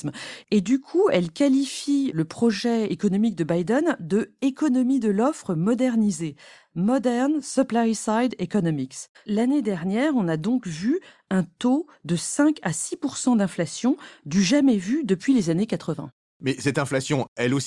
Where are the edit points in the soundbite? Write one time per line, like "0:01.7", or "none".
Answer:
0:09.1